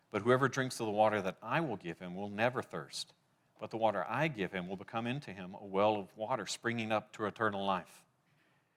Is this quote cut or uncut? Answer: uncut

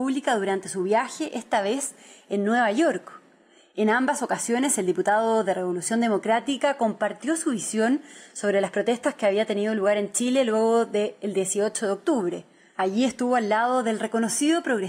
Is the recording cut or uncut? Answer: uncut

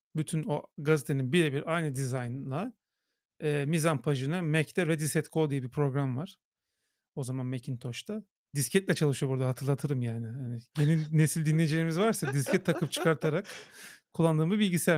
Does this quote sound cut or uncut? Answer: uncut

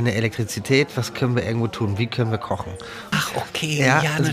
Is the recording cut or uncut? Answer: cut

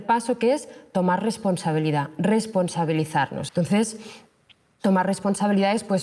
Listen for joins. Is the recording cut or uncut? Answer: cut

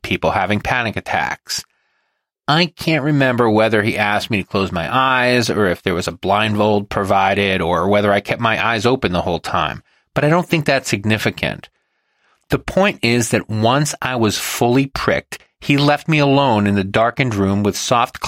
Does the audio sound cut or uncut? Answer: uncut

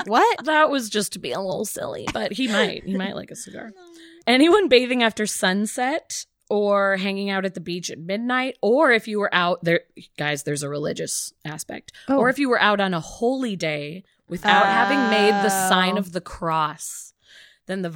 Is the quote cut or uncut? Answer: uncut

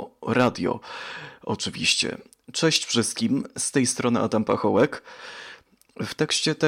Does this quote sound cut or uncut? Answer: uncut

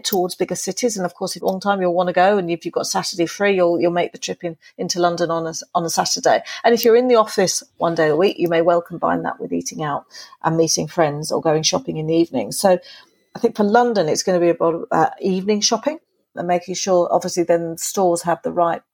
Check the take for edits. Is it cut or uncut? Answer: cut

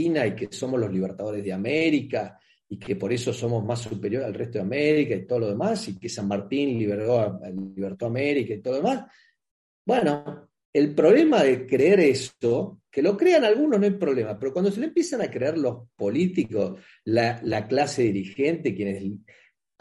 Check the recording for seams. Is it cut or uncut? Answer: uncut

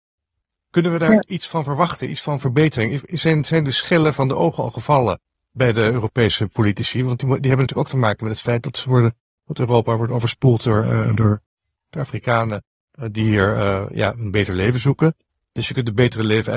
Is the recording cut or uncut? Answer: uncut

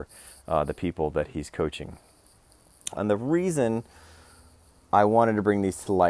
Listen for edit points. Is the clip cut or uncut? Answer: cut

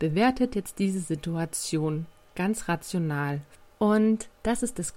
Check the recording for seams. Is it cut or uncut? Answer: uncut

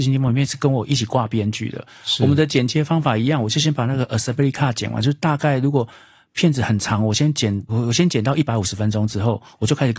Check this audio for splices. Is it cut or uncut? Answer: cut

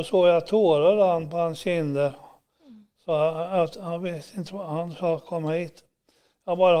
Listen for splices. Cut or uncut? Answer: uncut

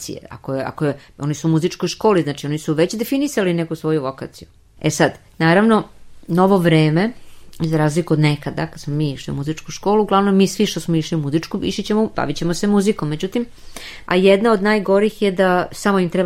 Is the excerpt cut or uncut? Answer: cut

